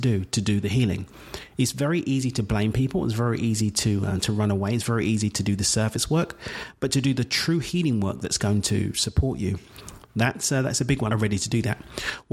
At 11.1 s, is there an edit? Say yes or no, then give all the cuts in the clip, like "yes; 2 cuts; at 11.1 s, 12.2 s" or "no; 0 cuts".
yes; 1 cut; at 11.1 s